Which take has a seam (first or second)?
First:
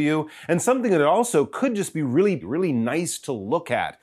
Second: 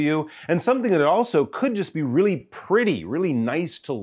first